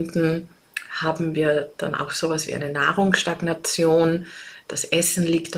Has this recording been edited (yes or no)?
no